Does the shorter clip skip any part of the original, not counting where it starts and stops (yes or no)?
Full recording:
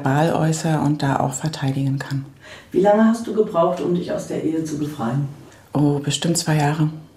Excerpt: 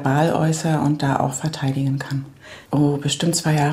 yes